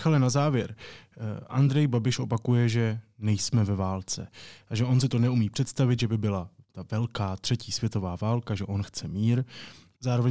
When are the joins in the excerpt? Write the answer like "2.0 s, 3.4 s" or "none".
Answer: none